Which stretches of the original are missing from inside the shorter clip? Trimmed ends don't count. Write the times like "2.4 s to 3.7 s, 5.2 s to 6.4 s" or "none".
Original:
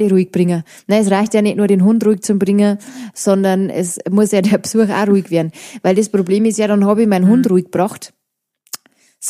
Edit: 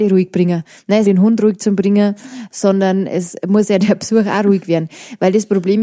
1.0 s to 1.7 s